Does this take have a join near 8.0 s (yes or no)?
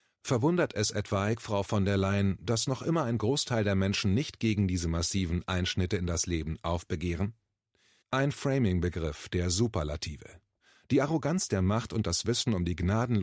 yes